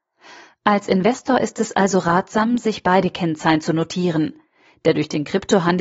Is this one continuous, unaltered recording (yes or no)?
yes